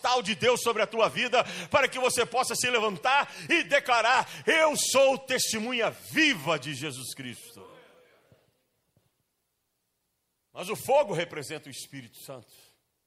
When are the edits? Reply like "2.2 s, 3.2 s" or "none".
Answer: none